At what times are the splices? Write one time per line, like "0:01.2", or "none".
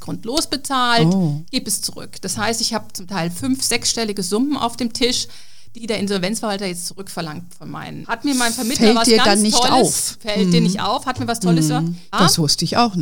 0:05.8
0:08.0
0:12.1